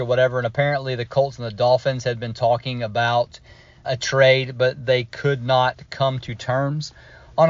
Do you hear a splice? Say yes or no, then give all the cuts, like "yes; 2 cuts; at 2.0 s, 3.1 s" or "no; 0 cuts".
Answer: yes; 1 cut; at 3.8 s